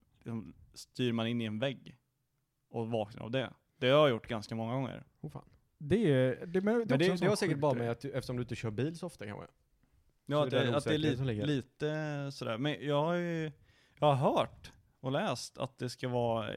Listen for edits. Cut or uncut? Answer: uncut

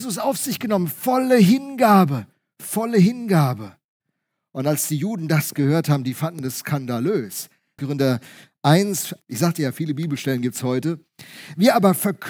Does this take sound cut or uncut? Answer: cut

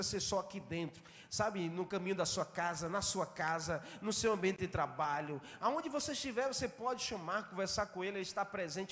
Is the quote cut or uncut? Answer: uncut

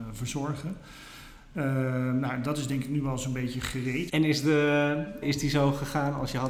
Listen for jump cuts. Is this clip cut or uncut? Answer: cut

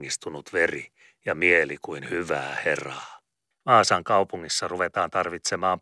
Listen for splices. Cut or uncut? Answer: cut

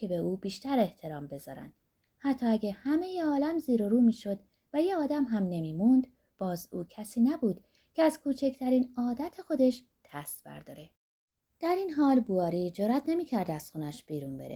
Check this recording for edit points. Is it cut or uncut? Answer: uncut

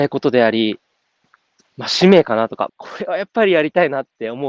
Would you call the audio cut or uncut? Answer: cut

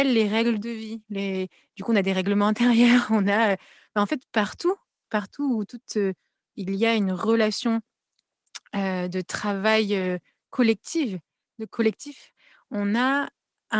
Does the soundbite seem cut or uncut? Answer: uncut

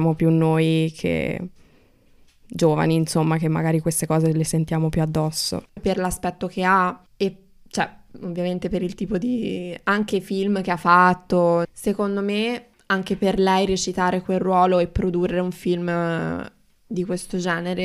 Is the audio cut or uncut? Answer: cut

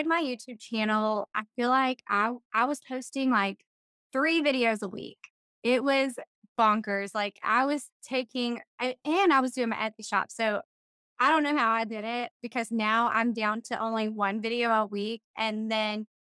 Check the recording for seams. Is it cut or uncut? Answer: uncut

